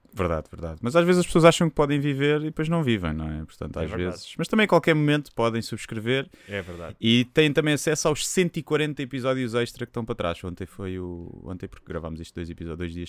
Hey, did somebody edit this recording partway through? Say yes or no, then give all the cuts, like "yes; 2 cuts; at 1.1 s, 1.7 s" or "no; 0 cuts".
no; 0 cuts